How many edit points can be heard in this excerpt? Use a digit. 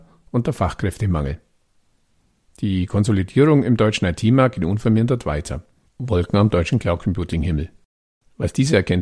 1